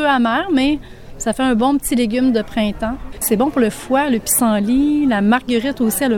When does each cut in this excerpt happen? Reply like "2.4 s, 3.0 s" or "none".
none